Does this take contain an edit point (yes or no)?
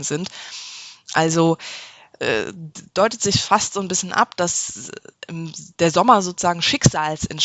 no